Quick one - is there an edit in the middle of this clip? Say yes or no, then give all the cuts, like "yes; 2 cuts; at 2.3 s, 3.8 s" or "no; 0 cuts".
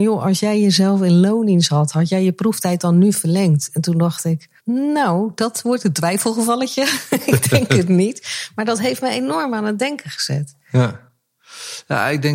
yes; 1 cut; at 4.6 s